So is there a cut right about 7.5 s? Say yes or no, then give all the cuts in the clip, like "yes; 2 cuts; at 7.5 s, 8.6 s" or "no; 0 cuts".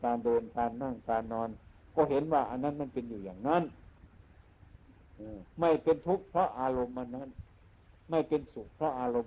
no; 1 cut; at 5.5 s